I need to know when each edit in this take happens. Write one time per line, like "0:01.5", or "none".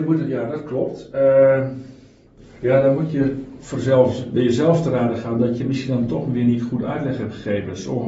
none